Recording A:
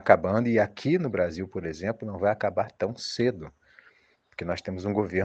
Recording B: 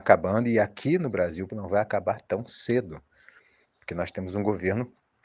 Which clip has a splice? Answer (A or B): B